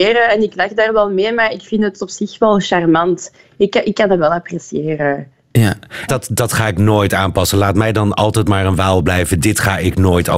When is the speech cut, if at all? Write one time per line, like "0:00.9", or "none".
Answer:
0:06.1